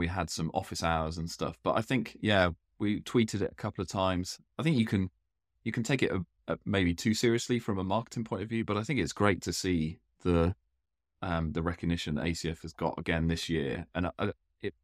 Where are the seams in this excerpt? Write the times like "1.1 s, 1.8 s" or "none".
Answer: none